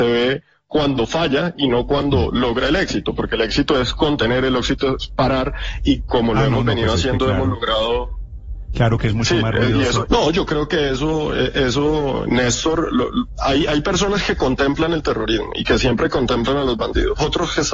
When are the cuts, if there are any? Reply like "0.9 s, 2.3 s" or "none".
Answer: 10.1 s, 12.3 s